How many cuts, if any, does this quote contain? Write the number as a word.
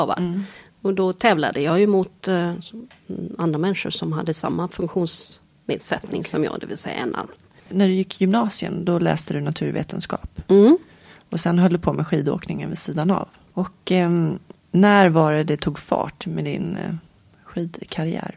zero